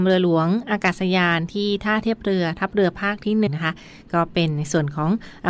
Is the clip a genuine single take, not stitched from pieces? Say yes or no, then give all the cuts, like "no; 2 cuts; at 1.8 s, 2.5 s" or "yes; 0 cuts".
no; 1 cut; at 3.5 s